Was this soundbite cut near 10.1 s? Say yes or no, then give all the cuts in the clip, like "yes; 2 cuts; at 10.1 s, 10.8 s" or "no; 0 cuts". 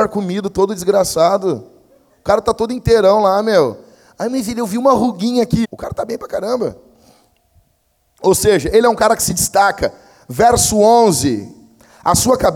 no; 1 cut; at 5.6 s